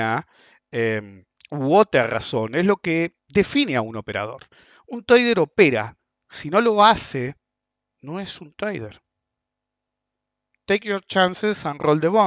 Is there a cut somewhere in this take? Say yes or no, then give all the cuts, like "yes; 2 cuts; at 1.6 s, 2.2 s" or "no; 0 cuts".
yes; 1 cut; at 3.2 s